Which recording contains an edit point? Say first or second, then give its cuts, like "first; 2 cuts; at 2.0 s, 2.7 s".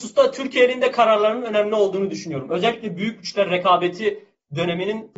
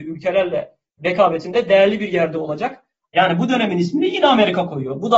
second; 1 cut; at 3.1 s